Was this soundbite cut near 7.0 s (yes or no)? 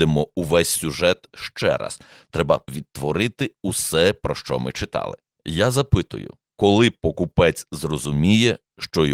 no